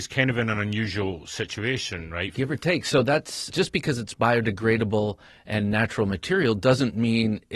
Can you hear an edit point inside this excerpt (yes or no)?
yes